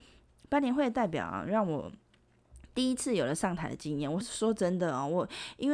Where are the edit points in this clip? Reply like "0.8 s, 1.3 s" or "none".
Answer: 4.2 s